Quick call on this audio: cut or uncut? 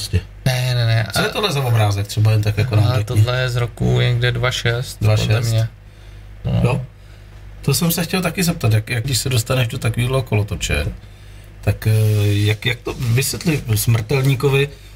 cut